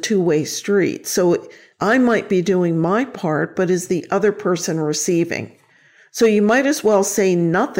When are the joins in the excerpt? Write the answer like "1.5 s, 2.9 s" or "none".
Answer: none